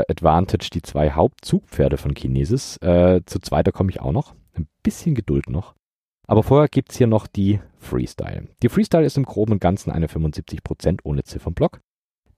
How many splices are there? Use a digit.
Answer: 0